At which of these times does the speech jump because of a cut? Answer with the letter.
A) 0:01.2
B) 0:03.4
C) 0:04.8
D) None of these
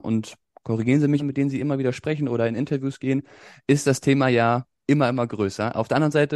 A